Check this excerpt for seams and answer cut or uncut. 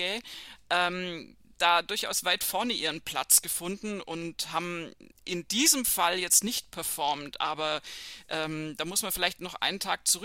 uncut